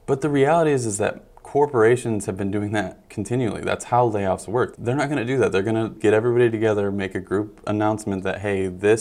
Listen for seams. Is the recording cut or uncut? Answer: cut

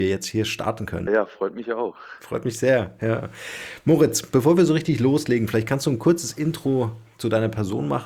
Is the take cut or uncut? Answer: cut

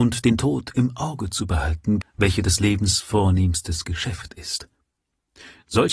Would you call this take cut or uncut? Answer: cut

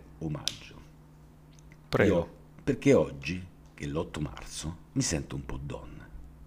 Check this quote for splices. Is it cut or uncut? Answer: cut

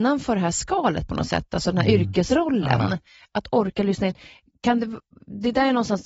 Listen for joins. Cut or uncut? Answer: uncut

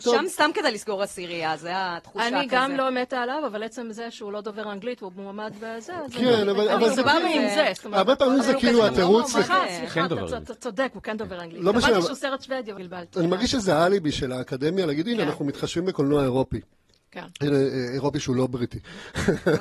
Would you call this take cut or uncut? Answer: uncut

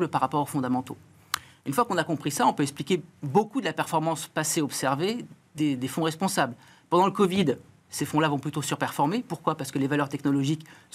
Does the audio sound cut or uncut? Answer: uncut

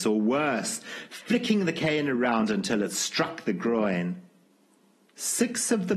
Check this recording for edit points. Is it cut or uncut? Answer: uncut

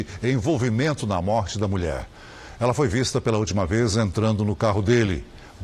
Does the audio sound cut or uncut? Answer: uncut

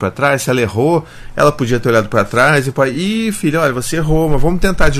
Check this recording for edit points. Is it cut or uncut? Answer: uncut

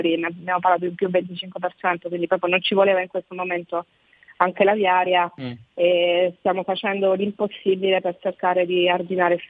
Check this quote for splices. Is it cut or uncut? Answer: uncut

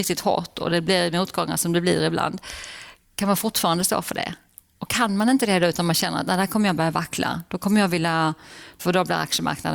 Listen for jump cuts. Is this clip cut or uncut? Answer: cut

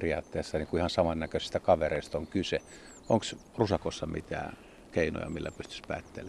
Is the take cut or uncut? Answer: cut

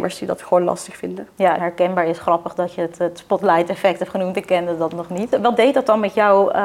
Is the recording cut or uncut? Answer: cut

